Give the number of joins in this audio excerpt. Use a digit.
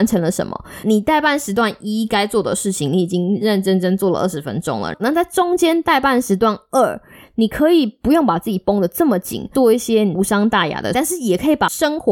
2